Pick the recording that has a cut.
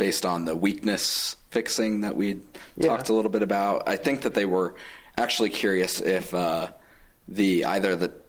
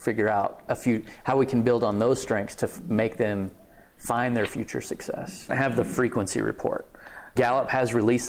second; 2 cuts; at 5.5 s, 7.4 s

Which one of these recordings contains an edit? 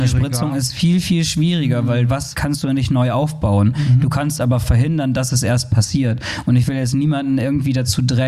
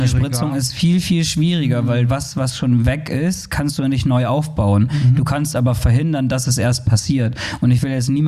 first; 1 cut; at 2.3 s

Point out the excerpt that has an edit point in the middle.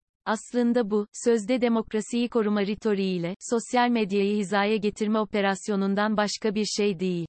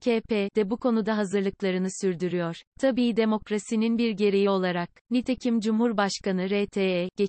second; 2 cuts; at 2.6 s, 5.0 s

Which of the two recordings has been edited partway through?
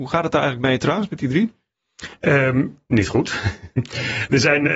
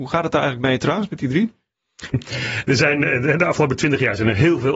second; 1 cut; at 2.1 s

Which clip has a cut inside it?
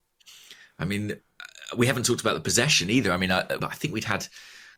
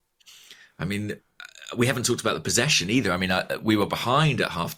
first; 1 cut; at 3.6 s

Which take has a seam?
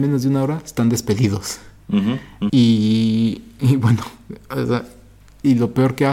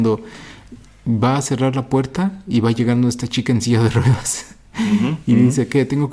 first; 1 cut; at 2.5 s

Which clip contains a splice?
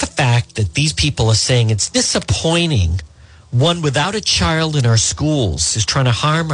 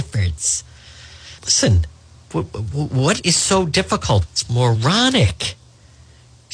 second; 2 cuts; at 1.4 s, 4.3 s

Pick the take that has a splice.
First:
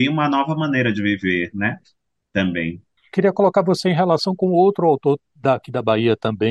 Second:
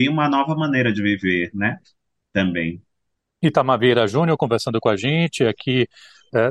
first; 1 cut; at 3.0 s

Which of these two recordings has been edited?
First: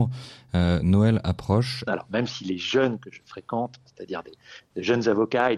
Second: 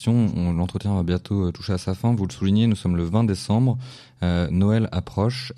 first; 1 cut; at 1.9 s

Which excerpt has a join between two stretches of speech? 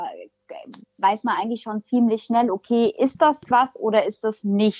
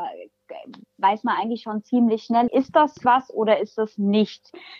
second; 1 cut; at 2.5 s

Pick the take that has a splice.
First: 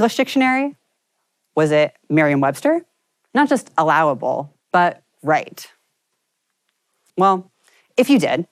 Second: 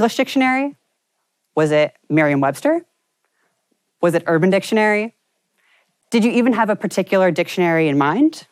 first; 3 cuts; at 3.3 s, 4.6 s, 7.1 s

